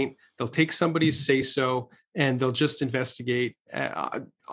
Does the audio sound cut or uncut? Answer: uncut